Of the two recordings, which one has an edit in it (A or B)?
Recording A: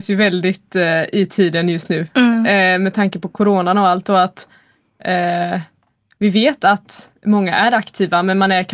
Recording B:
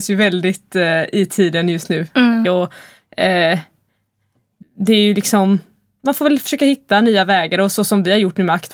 B